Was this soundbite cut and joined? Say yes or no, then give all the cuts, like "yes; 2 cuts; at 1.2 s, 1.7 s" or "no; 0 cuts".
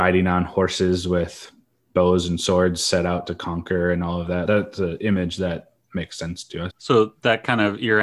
yes; 2 cuts; at 4.5 s, 6.7 s